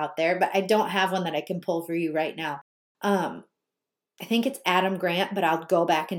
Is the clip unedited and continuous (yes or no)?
yes